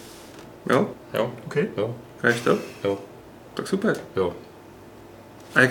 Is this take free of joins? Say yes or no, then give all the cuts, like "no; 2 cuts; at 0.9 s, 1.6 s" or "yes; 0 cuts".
no; 1 cut; at 0.9 s